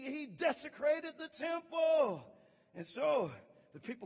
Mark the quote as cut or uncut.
uncut